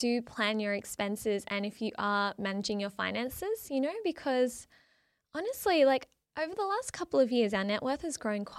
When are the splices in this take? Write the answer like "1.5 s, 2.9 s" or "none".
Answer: none